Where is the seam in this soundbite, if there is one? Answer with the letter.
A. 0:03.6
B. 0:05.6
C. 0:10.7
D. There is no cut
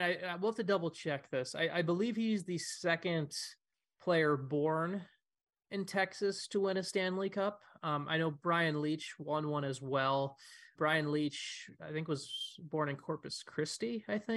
C